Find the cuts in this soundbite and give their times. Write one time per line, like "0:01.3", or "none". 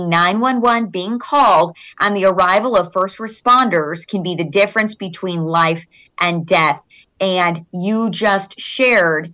none